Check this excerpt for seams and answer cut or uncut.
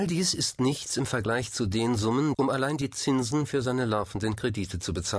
cut